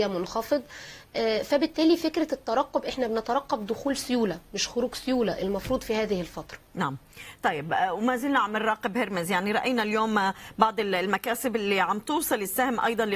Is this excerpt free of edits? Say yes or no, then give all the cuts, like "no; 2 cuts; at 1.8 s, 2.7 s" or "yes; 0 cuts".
no; 1 cut; at 6.7 s